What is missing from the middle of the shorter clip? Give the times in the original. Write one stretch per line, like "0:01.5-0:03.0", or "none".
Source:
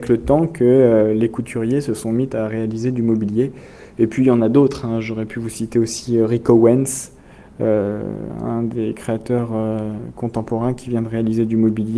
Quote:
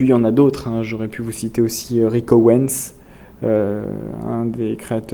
none